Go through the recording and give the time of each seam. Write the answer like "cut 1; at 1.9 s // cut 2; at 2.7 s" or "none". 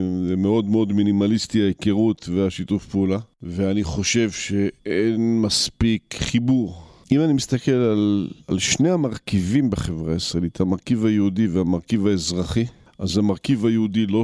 cut 1; at 7.0 s